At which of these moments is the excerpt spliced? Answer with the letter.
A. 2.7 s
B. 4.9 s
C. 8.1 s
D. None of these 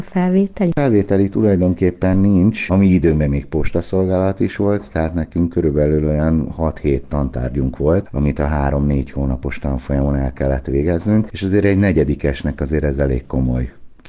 A